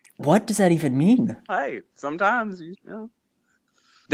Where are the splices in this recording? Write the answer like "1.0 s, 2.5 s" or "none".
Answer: 1.5 s, 2.7 s